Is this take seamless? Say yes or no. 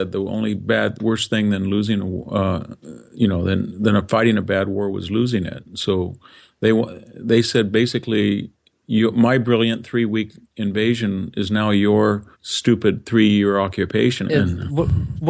no